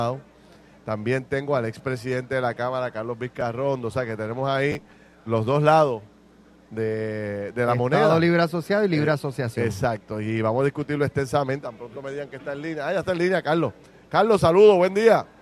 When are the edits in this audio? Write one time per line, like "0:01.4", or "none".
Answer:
0:11.6